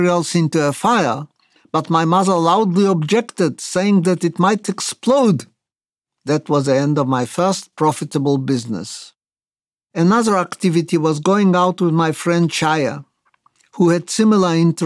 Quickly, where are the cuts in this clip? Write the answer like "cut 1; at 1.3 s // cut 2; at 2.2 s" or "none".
none